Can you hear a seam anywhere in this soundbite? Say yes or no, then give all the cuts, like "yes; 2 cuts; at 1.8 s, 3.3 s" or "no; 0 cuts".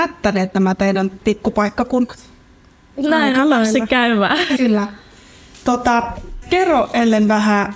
yes; 2 cuts; at 4.6 s, 6.4 s